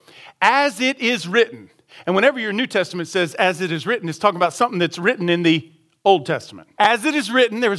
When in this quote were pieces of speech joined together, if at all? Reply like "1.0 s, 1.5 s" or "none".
6.7 s